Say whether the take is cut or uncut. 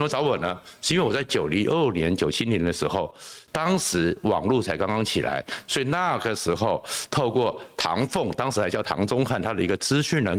uncut